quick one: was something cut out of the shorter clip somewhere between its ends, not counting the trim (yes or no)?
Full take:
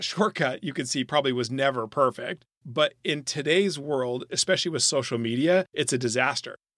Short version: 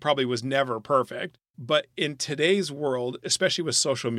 no